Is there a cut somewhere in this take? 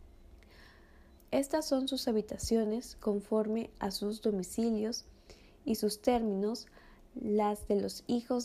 yes; 1 cut; at 1.2 s

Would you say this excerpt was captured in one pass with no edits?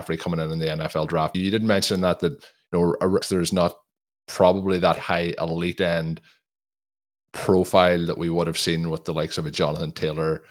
no; 3 cuts; at 1.3 s, 3.2 s, 5.0 s

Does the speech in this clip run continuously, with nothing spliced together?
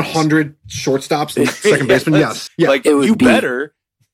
no; 1 cut; at 2.5 s

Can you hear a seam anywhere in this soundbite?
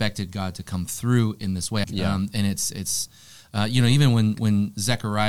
yes; 1 cut; at 1.8 s

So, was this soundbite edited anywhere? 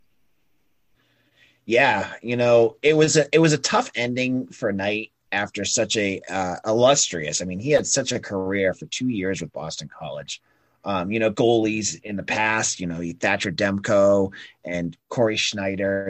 yes; 1 cut; at 11.3 s

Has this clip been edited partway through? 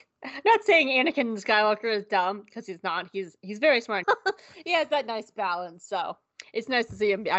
yes; 1 cut; at 4.0 s

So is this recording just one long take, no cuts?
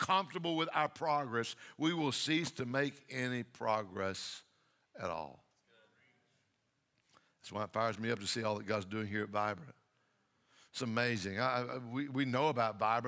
yes; 0 cuts

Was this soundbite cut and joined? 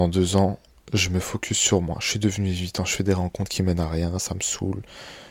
no; 0 cuts

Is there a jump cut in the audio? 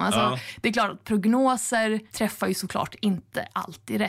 yes; 1 cut; at 2.1 s

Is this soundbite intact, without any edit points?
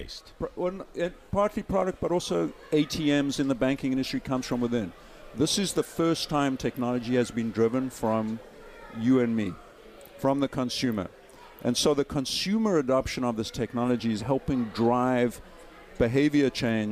no; 1 cut; at 14.2 s

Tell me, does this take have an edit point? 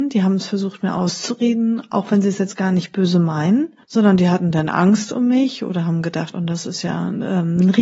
yes; 2 cuts; at 3.8 s, 6.3 s

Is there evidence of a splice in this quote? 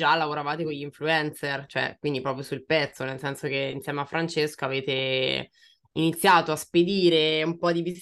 no; 0 cuts

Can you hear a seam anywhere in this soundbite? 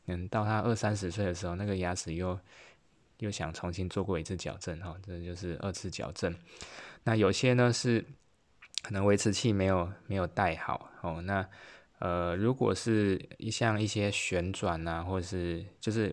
no; 0 cuts

